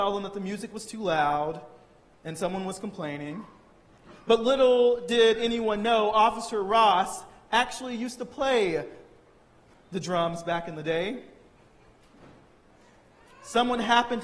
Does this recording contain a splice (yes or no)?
no